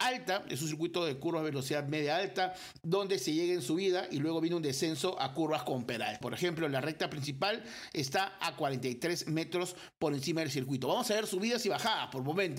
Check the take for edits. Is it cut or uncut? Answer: cut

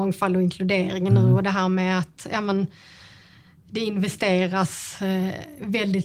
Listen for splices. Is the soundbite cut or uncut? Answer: uncut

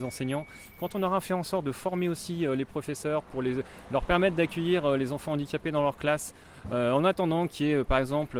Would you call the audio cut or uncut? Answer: uncut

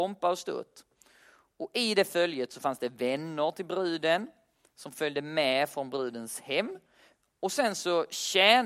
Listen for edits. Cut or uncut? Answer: uncut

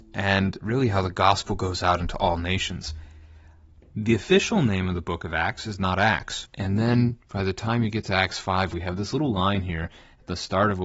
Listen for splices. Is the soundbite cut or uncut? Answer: cut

